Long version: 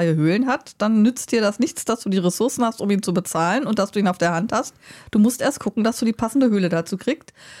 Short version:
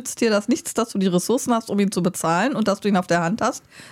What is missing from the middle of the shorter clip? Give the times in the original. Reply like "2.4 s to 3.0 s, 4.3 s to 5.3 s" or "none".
none